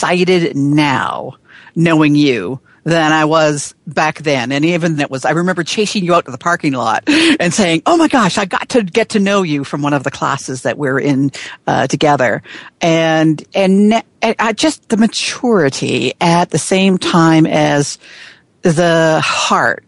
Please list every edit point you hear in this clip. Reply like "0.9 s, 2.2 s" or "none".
5.0 s